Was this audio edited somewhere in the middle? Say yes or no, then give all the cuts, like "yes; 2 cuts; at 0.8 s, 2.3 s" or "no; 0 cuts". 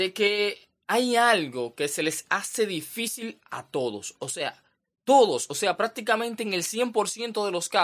no; 0 cuts